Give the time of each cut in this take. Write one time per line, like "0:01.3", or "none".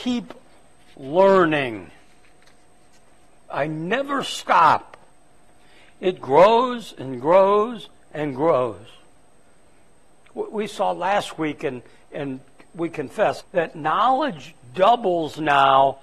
0:13.4